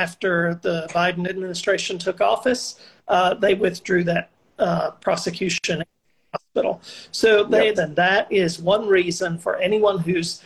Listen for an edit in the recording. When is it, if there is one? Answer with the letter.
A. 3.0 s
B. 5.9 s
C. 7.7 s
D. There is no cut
C